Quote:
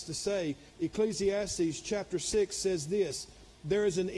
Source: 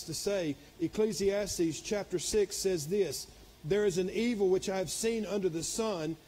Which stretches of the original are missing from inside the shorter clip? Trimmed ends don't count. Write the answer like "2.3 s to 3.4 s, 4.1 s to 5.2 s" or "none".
none